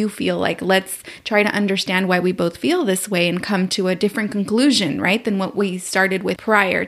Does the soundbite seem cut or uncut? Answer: uncut